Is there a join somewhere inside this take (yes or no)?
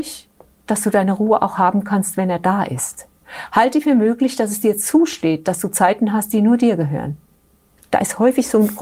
no